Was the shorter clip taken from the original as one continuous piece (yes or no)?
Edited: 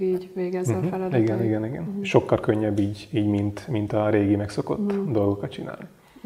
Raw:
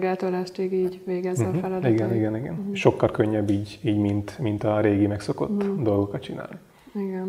yes